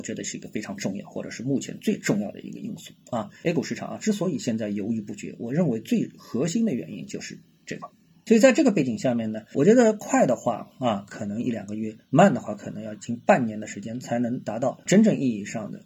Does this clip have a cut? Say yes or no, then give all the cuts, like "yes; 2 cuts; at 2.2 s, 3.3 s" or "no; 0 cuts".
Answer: no; 0 cuts